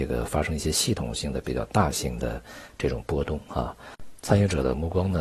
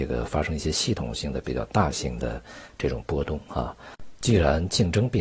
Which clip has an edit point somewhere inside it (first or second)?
second